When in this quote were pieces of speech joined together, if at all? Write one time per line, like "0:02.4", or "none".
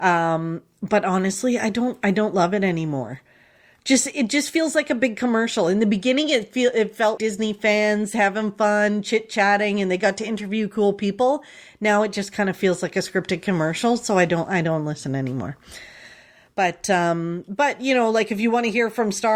0:07.2